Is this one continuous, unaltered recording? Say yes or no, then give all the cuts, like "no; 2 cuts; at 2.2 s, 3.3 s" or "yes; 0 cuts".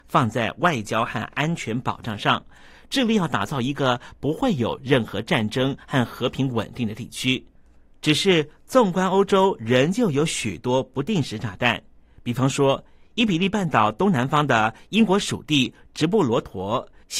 yes; 0 cuts